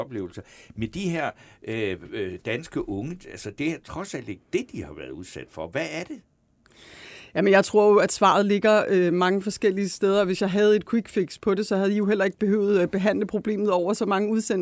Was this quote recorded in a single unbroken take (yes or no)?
yes